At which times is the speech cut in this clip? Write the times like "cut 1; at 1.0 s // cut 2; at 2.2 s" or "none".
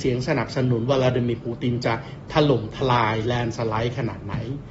none